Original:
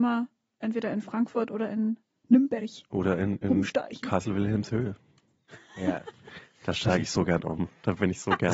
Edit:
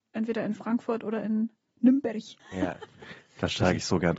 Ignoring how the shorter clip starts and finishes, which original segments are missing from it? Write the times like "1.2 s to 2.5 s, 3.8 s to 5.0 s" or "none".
2.9 s to 5.6 s